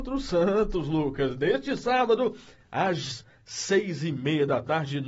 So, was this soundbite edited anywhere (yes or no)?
no